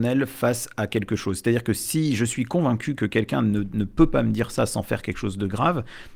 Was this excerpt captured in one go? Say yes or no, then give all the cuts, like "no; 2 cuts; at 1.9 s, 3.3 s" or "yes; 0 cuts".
yes; 0 cuts